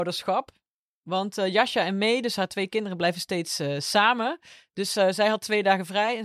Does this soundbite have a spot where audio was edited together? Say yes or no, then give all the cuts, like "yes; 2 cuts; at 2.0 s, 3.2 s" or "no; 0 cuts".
no; 0 cuts